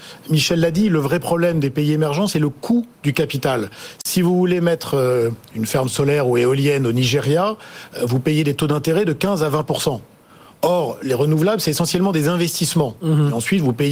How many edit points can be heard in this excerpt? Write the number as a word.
zero